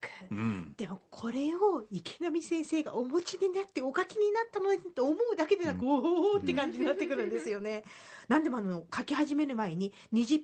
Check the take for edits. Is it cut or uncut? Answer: cut